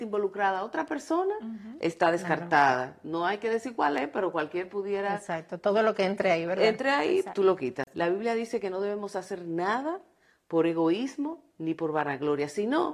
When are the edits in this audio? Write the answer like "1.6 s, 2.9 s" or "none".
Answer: 7.9 s